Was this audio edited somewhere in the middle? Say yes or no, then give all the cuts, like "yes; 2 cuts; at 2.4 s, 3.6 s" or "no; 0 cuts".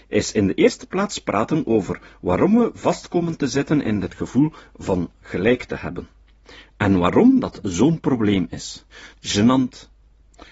yes; 1 cut; at 9.1 s